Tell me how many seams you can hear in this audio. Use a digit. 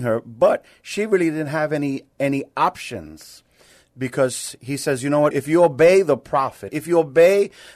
2